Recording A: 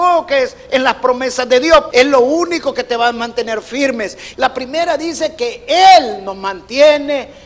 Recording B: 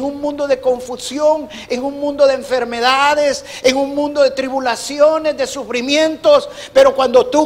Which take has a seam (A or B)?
A